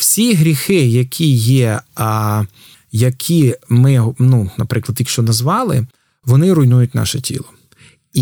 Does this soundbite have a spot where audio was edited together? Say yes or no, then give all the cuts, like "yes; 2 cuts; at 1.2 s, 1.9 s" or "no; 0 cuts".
no; 0 cuts